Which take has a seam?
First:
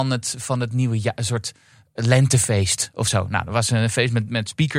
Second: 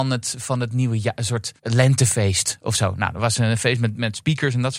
second; 1 cut; at 1.6 s

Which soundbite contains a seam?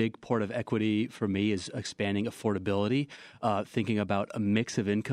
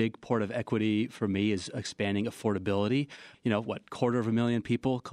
second; 1 cut; at 3.3 s

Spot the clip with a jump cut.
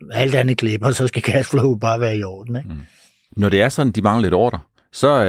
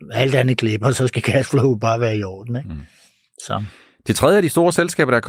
first; 1 cut; at 3.3 s

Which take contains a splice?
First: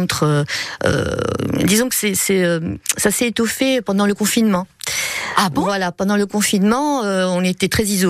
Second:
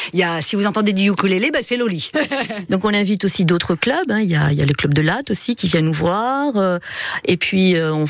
second; 1 cut; at 2.1 s

